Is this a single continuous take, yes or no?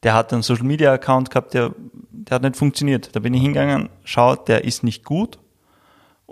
yes